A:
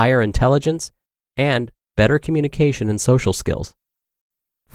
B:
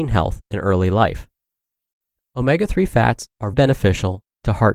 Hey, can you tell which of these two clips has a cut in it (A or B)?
B